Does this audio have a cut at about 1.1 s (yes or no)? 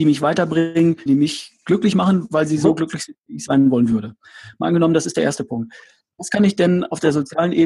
yes